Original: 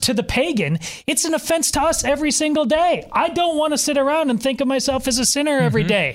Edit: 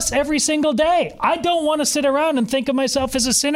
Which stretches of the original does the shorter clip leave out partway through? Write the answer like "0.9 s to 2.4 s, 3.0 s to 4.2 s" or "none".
none